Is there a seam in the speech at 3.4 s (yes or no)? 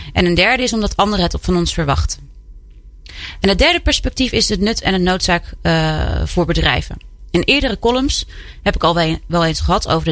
yes